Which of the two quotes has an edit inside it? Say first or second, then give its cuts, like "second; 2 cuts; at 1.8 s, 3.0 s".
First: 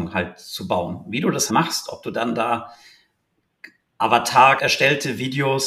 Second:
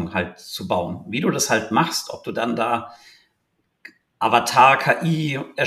first; 2 cuts; at 1.5 s, 4.6 s